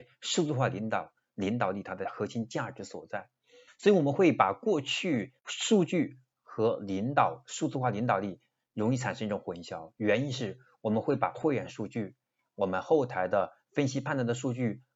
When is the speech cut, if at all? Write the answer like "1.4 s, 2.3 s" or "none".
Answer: 5.4 s